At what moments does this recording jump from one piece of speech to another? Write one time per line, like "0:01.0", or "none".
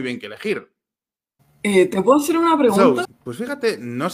0:01.4
0:03.0